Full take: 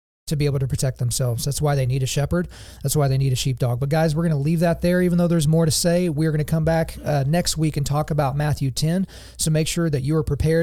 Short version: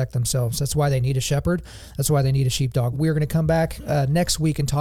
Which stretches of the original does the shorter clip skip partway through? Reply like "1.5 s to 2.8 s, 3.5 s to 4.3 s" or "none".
3.8 s to 6.1 s